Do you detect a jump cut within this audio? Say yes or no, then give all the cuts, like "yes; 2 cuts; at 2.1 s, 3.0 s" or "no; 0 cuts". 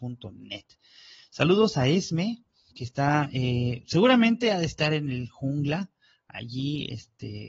yes; 1 cut; at 2.7 s